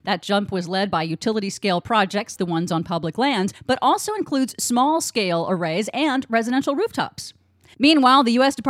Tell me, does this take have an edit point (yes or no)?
yes